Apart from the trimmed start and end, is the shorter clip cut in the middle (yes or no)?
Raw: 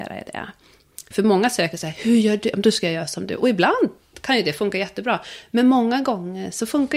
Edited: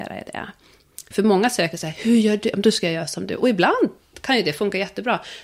no